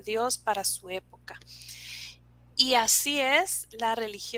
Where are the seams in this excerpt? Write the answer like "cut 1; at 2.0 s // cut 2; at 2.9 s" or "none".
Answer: cut 1; at 2.5 s